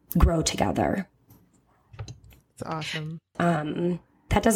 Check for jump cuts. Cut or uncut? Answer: cut